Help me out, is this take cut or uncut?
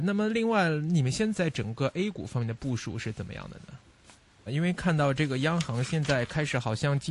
cut